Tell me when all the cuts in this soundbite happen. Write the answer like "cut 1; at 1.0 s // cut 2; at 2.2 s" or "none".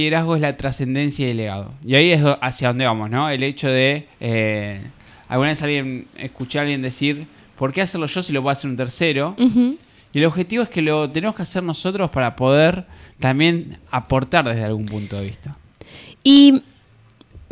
cut 1; at 4.1 s